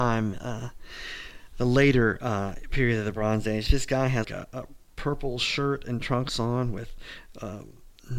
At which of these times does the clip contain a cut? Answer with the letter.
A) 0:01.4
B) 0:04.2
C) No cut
B